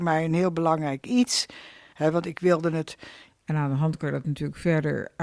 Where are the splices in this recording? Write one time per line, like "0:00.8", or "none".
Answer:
0:01.9
0:03.3